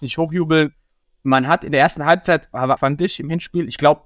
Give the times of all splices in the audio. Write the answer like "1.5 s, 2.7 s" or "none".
1.0 s, 2.8 s